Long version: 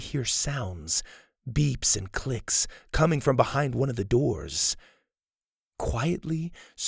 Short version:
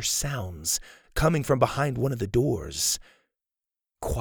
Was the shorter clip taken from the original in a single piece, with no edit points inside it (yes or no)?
no